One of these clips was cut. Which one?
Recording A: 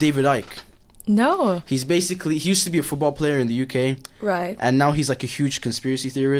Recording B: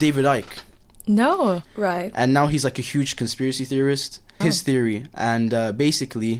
B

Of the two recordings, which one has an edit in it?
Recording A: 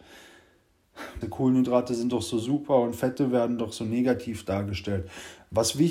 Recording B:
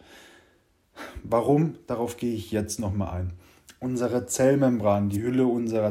A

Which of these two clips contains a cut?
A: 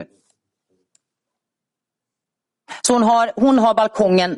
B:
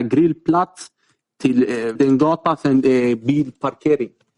B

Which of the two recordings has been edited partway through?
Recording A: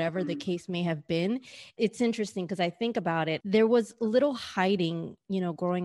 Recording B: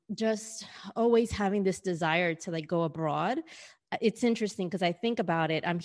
A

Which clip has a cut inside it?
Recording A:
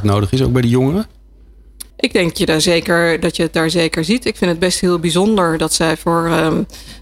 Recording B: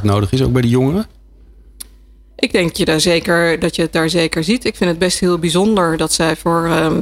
A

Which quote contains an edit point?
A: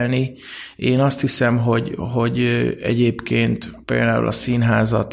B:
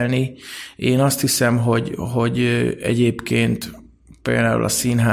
A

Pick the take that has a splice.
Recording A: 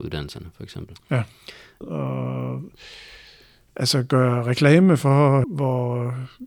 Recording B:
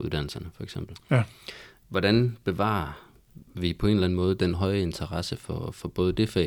A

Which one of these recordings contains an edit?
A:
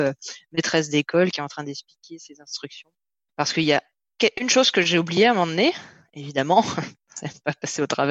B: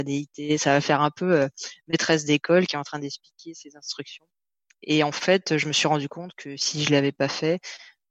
A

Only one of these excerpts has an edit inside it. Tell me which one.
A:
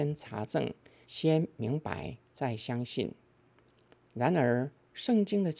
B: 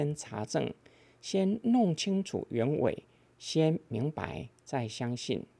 A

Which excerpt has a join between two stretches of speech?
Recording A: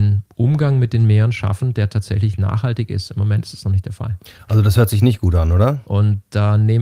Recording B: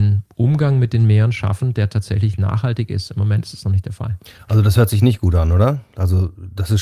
A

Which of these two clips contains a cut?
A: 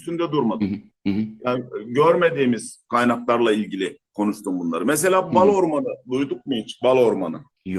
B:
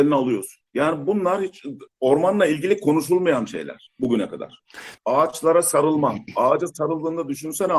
B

